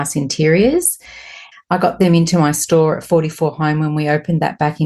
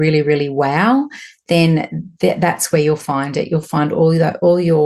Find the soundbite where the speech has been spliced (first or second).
first